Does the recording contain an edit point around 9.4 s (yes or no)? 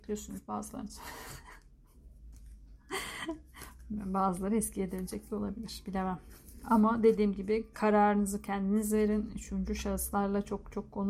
no